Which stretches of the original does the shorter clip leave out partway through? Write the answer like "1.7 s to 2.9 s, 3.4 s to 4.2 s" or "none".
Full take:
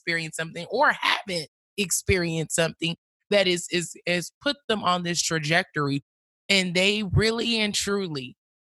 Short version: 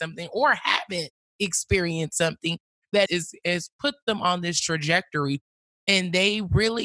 3.4 s to 3.7 s